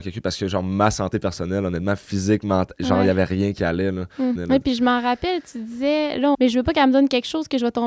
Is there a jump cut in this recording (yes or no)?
yes